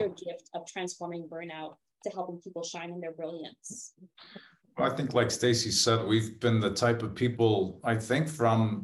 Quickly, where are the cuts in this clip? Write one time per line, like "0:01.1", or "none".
none